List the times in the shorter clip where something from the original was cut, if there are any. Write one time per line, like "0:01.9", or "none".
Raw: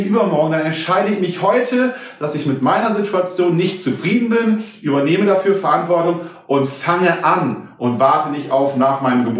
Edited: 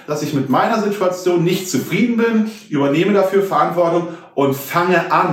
none